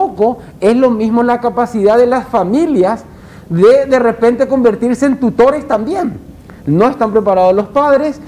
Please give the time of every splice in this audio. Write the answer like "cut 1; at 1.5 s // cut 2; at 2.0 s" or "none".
cut 1; at 6.6 s

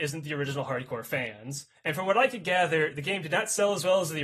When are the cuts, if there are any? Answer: none

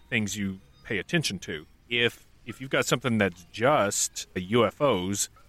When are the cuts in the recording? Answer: cut 1; at 1.8 s // cut 2; at 4.4 s

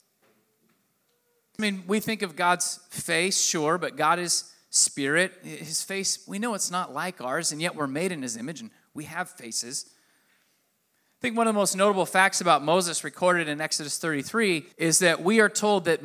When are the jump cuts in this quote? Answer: cut 1; at 1.6 s // cut 2; at 14.7 s

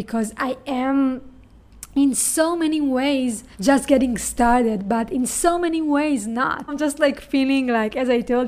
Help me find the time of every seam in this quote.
cut 1; at 3.5 s // cut 2; at 6.7 s

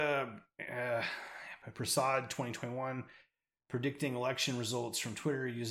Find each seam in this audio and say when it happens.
none

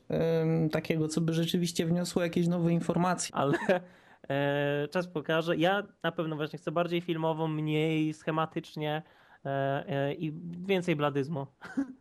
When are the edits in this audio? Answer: cut 1; at 3.3 s

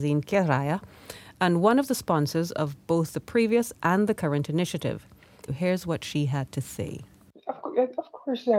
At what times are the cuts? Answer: cut 1; at 5.5 s

